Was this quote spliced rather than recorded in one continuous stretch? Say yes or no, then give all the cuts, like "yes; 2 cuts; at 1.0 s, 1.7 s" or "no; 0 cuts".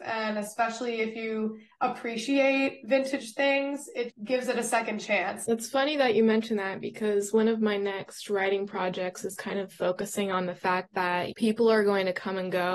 yes; 1 cut; at 5.4 s